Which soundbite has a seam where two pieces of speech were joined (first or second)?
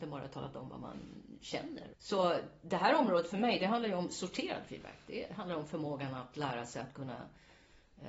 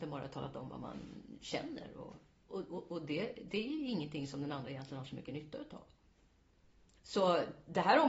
first